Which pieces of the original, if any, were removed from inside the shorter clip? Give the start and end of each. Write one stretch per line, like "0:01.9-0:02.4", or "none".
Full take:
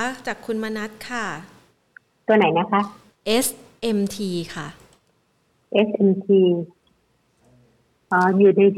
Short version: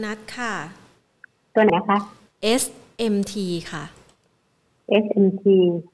0:02.4-0:02.5